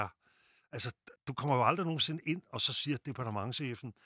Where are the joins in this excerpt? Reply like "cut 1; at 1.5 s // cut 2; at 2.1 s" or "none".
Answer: cut 1; at 1.2 s